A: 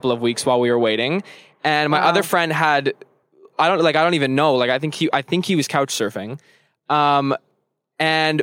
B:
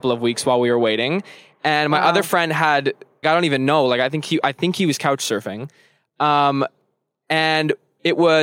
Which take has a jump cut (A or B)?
B